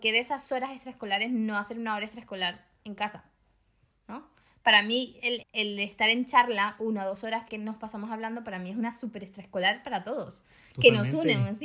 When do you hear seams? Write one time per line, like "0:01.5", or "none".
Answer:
0:05.4
0:07.5